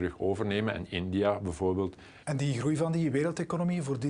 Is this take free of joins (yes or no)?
no